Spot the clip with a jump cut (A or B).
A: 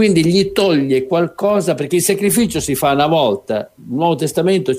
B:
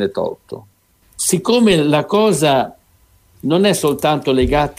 B